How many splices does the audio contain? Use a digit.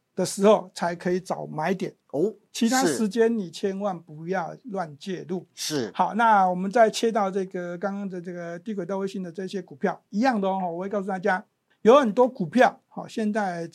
0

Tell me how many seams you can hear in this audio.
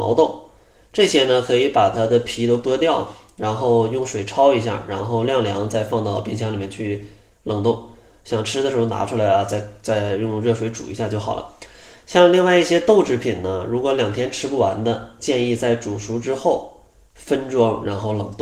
0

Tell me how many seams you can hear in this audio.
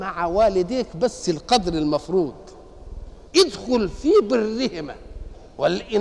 1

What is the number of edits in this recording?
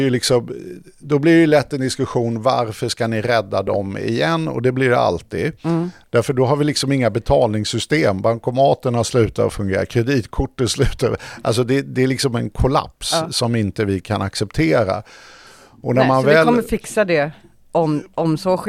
1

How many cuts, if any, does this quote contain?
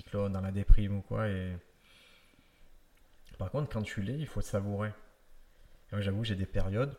1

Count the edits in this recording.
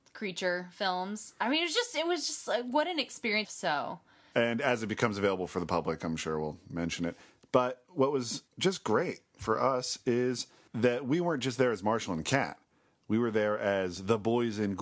1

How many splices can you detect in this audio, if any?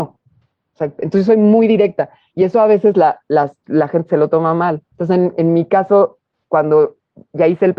1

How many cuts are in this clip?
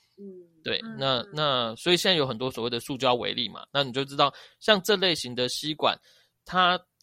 0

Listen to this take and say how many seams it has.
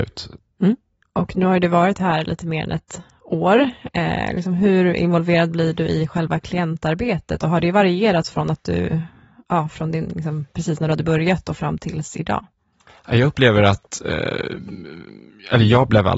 0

